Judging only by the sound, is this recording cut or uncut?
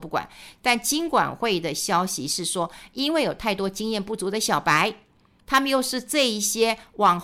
uncut